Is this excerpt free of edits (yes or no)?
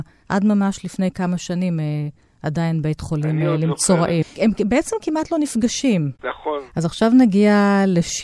no